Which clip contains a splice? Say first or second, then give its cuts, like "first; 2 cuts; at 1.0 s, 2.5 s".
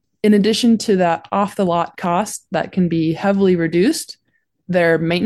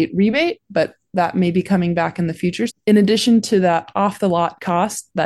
second; 1 cut; at 2.7 s